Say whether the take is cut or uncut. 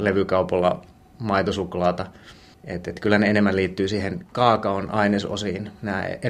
uncut